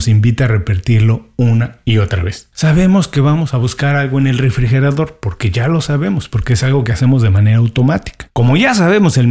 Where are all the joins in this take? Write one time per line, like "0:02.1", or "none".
0:02.5
0:08.3